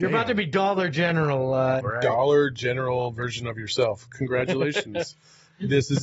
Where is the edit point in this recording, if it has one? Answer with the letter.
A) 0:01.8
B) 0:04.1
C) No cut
A